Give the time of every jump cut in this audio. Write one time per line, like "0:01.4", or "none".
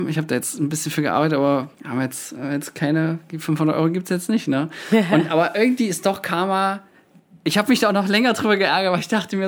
0:01.7